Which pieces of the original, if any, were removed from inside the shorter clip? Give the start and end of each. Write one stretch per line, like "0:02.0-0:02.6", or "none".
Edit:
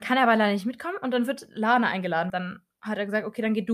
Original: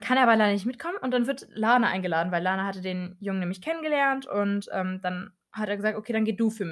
0:02.3-0:05.0